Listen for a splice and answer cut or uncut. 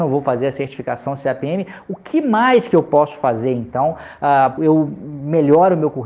cut